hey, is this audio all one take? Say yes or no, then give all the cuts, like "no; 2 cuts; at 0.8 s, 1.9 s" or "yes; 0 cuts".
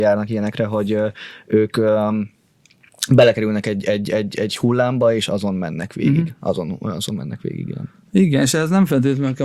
yes; 0 cuts